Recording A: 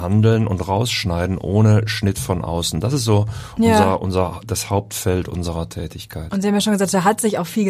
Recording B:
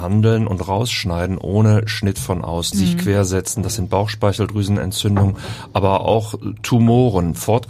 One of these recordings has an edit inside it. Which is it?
B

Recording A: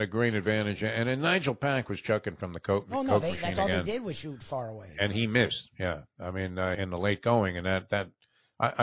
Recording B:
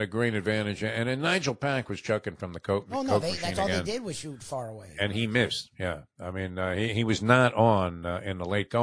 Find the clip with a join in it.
A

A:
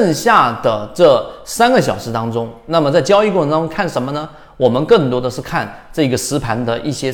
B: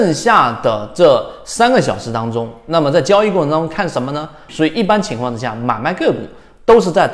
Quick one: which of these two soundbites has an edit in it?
B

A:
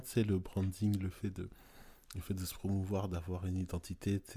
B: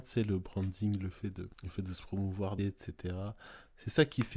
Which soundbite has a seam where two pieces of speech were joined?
B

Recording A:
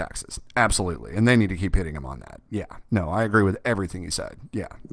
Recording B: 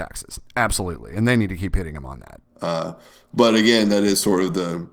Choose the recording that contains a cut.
B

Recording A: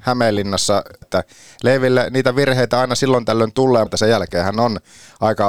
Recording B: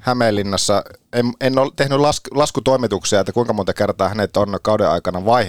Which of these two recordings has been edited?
A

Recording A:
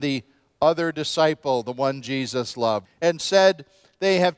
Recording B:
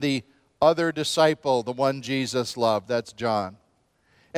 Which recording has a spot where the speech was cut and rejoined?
A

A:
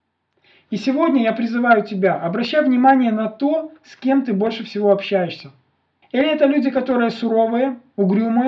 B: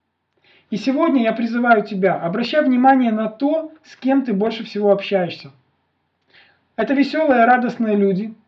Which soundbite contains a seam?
A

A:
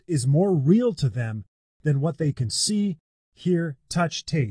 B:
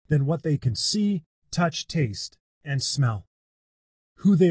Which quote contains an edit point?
B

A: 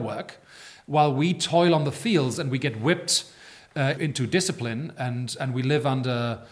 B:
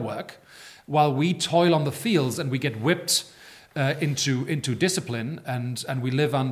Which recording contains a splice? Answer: A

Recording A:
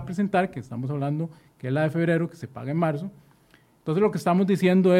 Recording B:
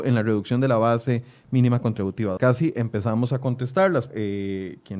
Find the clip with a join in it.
B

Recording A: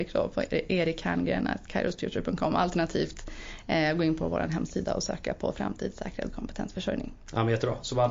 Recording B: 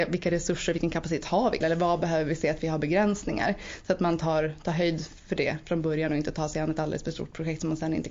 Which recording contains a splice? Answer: B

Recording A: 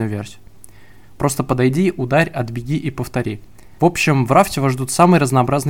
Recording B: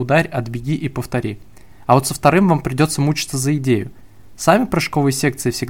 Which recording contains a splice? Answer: A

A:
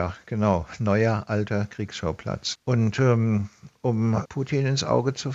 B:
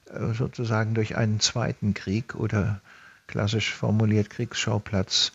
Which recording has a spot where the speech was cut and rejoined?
A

